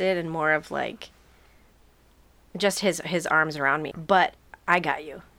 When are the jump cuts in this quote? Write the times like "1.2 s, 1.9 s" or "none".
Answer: 3.9 s